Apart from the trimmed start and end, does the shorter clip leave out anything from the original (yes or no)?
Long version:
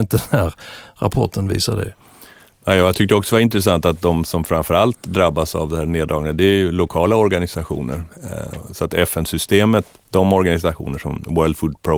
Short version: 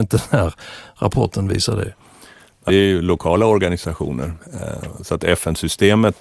yes